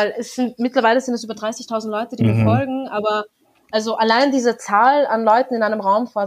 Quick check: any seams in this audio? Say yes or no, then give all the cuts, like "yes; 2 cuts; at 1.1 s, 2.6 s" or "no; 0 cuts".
no; 0 cuts